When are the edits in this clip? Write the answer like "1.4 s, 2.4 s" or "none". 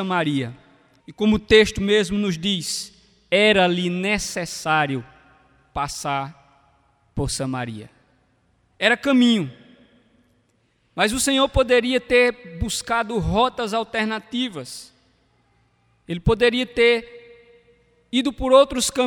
1.0 s